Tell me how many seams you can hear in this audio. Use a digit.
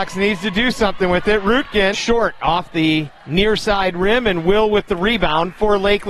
1